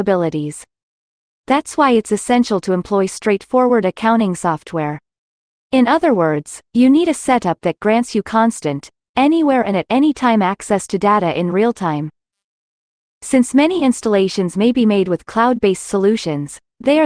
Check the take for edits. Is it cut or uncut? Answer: uncut